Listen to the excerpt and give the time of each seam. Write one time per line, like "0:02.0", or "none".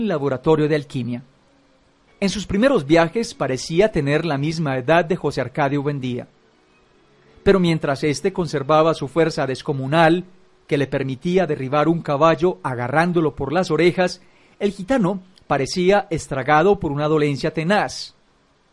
0:02.1